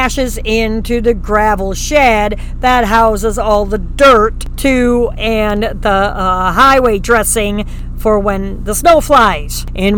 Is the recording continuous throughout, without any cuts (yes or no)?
yes